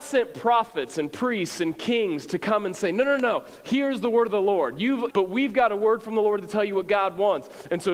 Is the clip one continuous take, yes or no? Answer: no